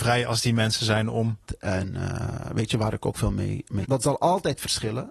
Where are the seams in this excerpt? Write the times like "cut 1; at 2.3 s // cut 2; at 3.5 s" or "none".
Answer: cut 1; at 1.5 s // cut 2; at 3.8 s